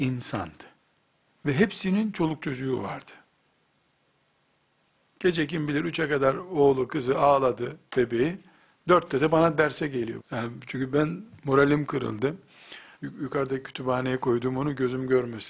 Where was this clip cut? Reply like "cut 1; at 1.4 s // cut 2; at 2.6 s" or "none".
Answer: cut 1; at 10.2 s // cut 2; at 13.0 s